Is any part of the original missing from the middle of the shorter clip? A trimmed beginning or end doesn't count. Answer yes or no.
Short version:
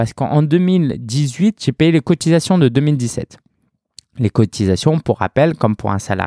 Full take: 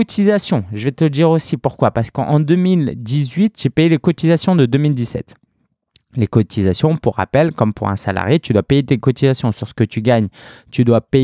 no